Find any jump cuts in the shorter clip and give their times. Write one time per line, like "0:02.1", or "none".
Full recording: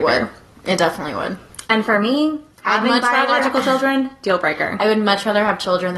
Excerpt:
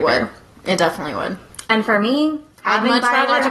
none